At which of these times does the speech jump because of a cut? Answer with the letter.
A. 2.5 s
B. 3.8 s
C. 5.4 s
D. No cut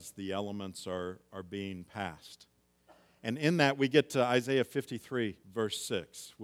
C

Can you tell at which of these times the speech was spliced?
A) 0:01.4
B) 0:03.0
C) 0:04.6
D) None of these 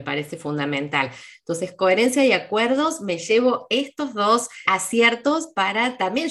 C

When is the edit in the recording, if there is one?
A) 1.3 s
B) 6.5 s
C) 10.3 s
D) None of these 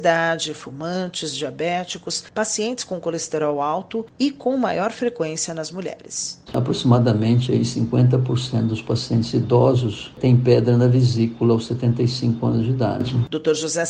B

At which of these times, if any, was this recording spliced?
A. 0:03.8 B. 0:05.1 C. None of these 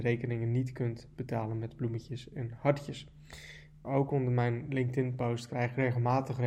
A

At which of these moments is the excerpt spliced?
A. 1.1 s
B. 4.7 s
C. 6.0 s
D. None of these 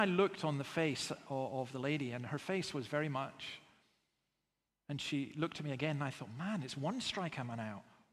B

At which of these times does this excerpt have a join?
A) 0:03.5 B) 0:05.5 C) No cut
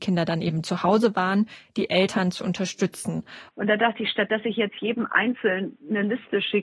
A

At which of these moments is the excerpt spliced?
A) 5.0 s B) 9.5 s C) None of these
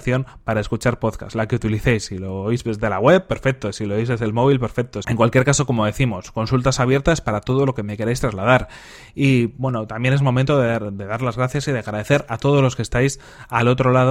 A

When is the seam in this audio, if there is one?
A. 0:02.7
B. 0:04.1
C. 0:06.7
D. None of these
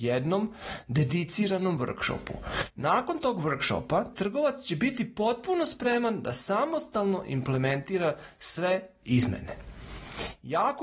B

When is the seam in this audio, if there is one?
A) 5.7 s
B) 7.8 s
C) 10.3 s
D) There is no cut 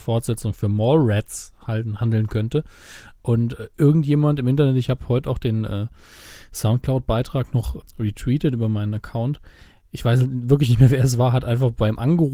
B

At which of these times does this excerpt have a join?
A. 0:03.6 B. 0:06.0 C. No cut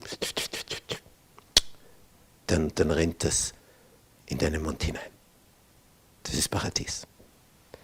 C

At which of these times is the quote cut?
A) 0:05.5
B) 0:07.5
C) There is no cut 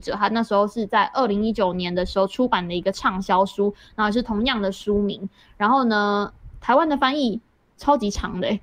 C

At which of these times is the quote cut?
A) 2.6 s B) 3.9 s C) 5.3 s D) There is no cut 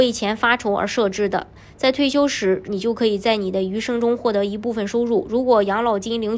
A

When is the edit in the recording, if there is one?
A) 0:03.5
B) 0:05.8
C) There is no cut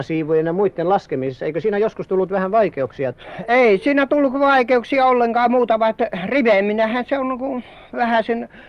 C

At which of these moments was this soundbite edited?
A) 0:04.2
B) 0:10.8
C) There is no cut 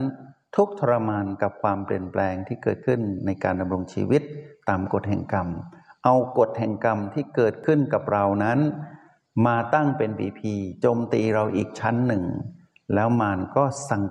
C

